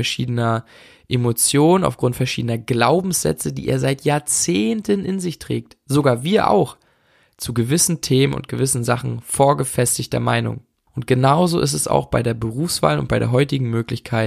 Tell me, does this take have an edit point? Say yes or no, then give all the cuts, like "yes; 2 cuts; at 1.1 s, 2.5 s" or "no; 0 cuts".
yes; 1 cut; at 10.9 s